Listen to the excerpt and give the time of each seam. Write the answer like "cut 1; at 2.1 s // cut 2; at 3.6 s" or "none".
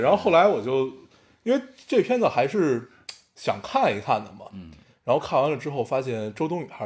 none